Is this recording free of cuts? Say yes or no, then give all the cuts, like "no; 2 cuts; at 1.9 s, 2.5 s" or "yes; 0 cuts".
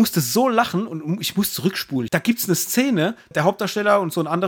no; 2 cuts; at 2.1 s, 3.3 s